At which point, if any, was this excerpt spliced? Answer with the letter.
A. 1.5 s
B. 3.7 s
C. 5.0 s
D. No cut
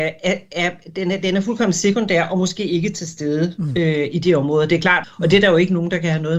C